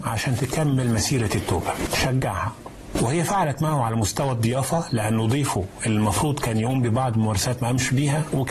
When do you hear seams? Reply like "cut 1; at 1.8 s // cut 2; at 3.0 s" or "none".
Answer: cut 1; at 1.9 s